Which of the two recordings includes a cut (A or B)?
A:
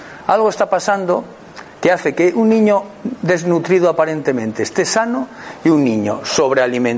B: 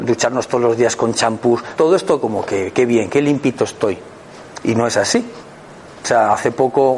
B